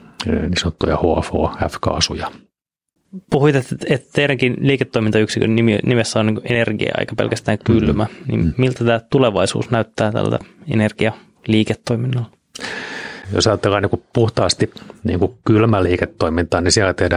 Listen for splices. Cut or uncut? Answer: uncut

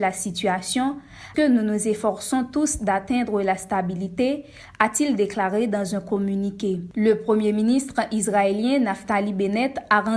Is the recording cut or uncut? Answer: cut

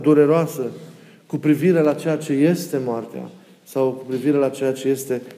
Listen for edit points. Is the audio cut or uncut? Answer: uncut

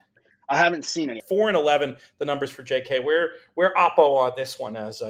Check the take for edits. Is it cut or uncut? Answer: cut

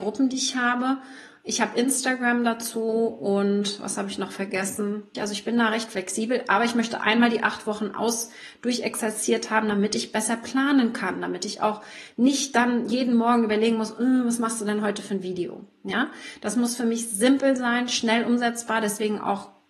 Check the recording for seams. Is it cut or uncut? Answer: cut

